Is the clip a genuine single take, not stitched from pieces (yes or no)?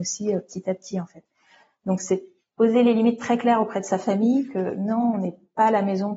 yes